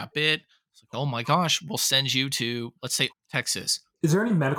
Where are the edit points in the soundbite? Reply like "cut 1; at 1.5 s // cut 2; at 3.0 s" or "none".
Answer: cut 1; at 3.1 s

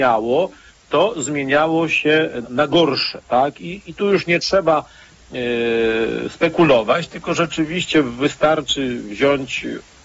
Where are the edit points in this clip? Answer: cut 1; at 2.4 s

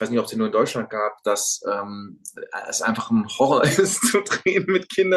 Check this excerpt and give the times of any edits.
none

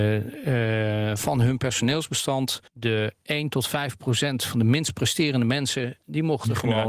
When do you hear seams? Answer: cut 1; at 2.7 s

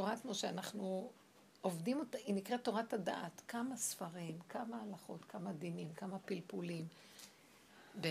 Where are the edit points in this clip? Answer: none

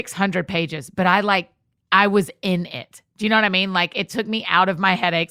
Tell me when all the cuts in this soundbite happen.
none

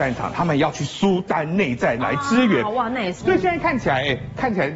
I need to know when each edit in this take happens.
cut 1; at 3.2 s

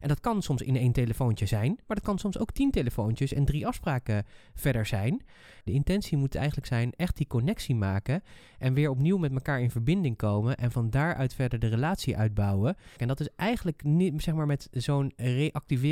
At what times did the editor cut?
cut 1; at 5.7 s // cut 2; at 13.0 s

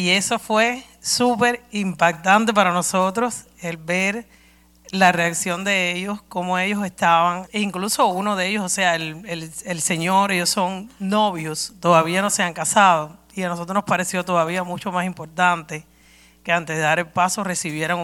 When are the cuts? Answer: cut 1; at 7.5 s

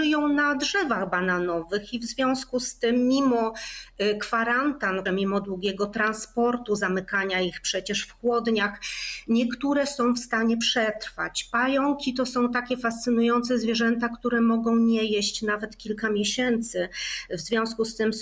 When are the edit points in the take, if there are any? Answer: cut 1; at 5.1 s

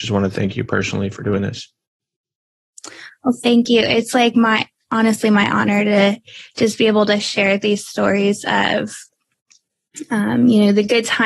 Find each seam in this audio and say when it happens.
cut 1; at 4.7 s

